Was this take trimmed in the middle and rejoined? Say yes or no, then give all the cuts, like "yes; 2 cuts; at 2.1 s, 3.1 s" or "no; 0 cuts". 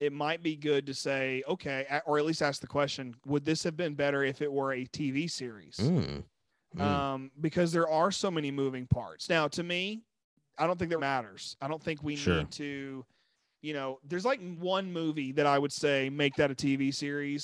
yes; 1 cut; at 11.0 s